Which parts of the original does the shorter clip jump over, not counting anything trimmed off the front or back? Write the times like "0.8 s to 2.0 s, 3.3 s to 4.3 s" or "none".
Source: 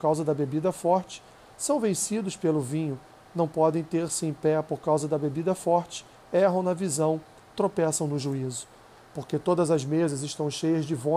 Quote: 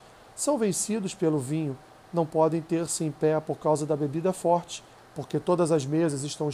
6.2 s to 9.0 s